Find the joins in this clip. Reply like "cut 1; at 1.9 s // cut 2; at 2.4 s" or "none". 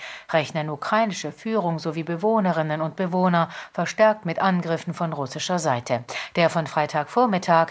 none